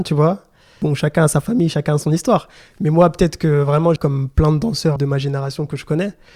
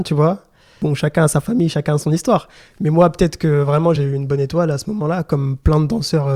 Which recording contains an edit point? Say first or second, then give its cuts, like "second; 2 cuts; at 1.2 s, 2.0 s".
first; 2 cuts; at 4.0 s, 5.0 s